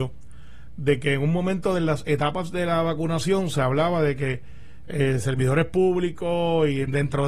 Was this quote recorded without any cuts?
yes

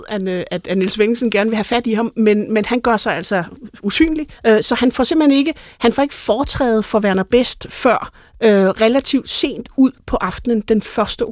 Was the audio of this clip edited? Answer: yes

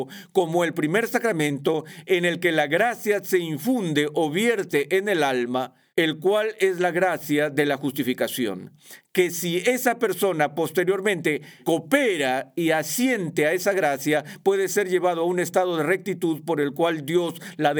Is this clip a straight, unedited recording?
yes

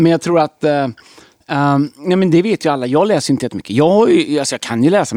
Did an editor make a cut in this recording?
no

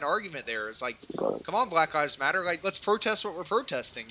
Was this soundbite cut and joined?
yes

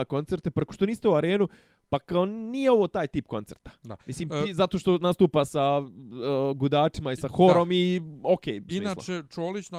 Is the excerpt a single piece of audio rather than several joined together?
no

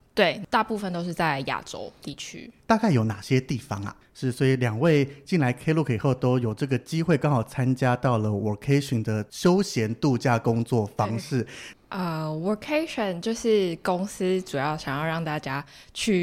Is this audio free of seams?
no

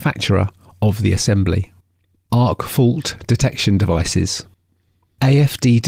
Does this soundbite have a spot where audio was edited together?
yes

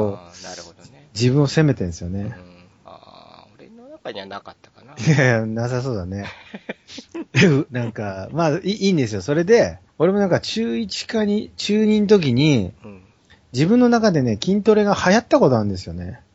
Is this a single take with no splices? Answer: no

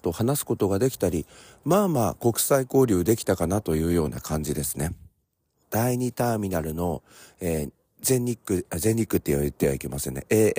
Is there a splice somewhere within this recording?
yes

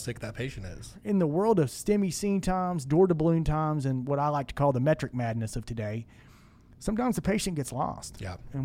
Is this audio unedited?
yes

